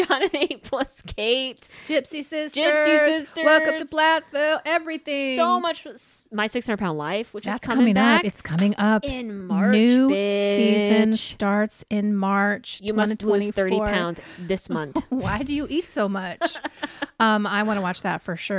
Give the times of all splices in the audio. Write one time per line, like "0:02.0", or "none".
none